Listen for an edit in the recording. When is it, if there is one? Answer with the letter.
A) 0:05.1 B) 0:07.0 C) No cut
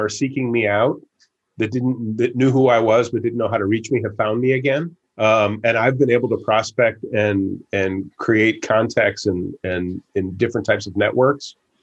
A